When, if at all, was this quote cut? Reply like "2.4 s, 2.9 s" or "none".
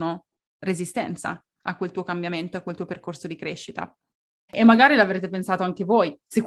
4.5 s